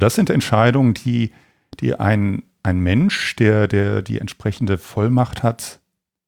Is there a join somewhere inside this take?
no; 0 cuts

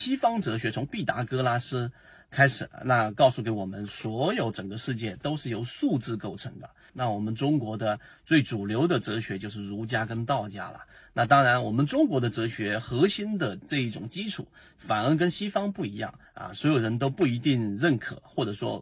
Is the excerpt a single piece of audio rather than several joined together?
no; 2 cuts; at 6.9 s, 16.2 s

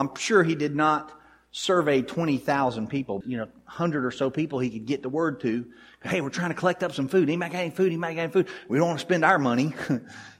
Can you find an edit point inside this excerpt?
yes; 1 cut; at 3.2 s

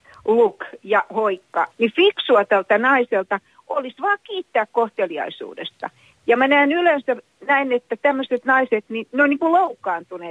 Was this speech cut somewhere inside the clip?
yes; 1 cut; at 1.7 s

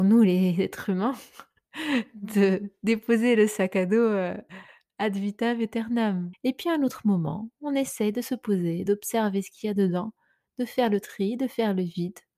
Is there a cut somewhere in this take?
yes; 2 cuts; at 6.3 s, 8.9 s

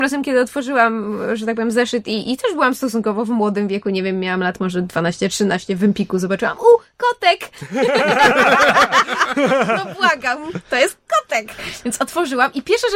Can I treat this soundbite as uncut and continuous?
yes; 0 cuts

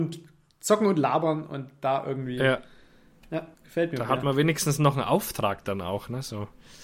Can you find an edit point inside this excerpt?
yes; 1 cut; at 3.5 s

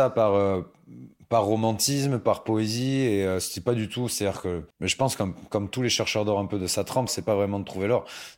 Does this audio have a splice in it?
yes; 2 cuts; at 4.7 s, 7.1 s

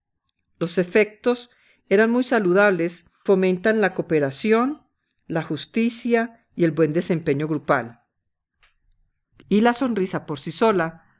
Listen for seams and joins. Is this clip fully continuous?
no; 2 cuts; at 3.3 s, 9.3 s

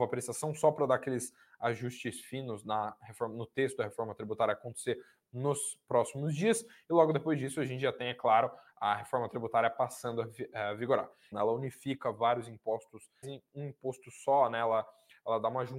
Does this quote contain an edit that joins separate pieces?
yes; 2 cuts; at 11.3 s, 13.2 s

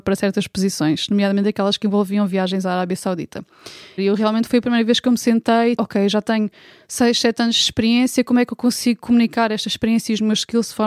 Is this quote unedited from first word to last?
no; 2 cuts; at 4.0 s, 5.8 s

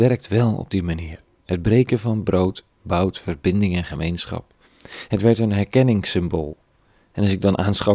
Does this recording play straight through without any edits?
yes; 0 cuts

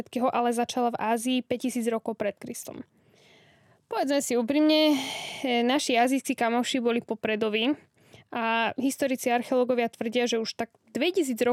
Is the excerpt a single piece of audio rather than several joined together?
yes; 0 cuts

